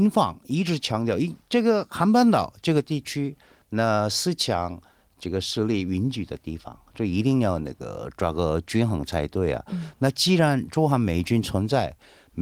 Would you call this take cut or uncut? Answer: uncut